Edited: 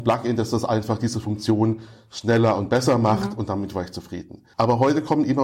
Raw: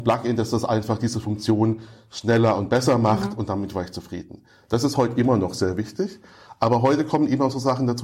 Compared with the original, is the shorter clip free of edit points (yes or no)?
no